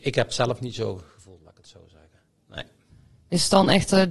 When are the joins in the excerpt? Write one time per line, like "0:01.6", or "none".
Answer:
0:02.4